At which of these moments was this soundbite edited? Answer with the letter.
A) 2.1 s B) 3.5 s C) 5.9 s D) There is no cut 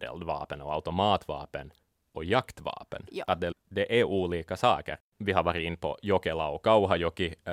B